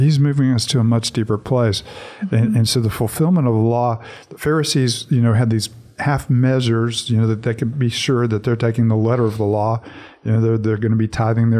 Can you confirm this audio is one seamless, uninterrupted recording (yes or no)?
yes